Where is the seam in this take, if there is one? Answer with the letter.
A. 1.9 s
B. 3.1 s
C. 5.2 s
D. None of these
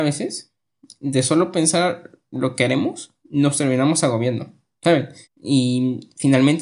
C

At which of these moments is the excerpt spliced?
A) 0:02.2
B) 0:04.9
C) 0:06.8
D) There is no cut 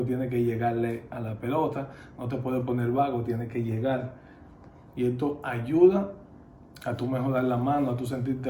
C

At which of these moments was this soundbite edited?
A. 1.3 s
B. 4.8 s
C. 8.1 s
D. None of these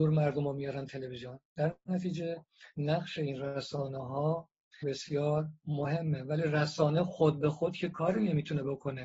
B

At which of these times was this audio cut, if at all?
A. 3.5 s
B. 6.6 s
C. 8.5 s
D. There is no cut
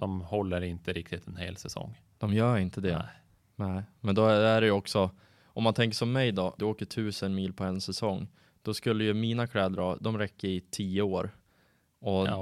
B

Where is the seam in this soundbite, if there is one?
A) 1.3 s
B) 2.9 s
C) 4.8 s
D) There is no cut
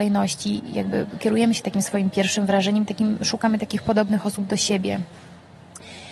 D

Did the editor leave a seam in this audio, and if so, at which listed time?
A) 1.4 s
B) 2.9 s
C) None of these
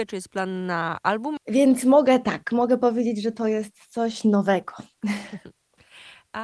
A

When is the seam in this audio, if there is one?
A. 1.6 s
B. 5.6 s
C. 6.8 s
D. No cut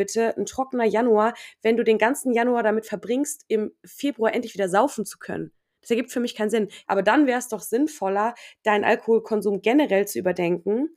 C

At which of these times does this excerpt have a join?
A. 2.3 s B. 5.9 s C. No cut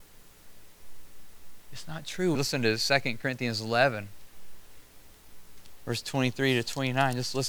A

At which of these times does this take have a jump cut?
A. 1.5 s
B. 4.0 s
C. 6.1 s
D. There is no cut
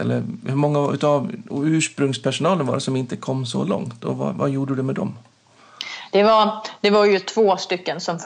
D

